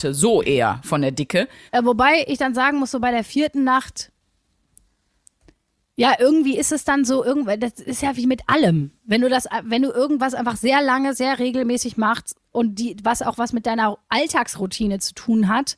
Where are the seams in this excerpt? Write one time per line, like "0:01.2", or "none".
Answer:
0:01.7